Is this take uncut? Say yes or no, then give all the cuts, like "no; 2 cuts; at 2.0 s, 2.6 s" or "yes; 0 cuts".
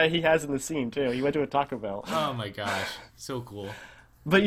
yes; 0 cuts